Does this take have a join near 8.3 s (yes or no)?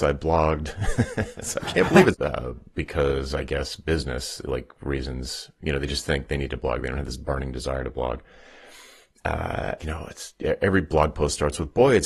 no